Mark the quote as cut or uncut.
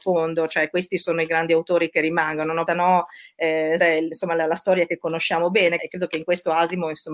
cut